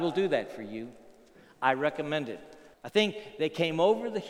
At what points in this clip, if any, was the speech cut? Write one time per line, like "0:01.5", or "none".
0:02.7